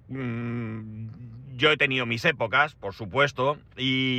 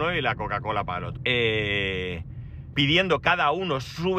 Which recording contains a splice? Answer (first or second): second